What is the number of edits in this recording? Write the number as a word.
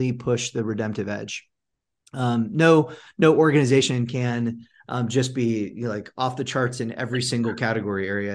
zero